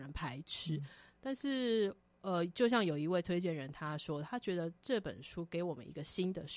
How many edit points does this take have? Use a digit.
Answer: 0